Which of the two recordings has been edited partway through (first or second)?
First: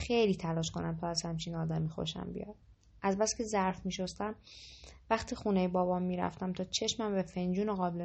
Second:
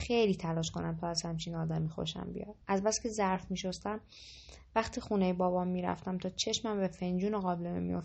second